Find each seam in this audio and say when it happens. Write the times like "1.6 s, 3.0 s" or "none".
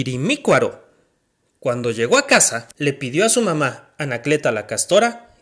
2.7 s